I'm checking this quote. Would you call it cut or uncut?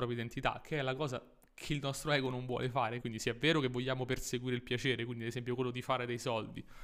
cut